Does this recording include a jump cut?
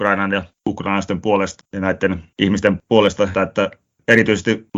yes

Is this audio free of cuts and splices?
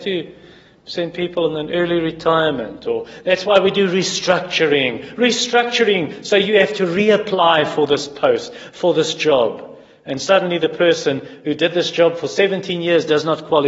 yes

